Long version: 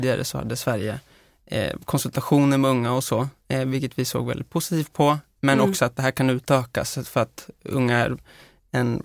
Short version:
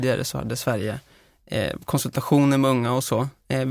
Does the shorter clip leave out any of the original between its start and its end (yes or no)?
no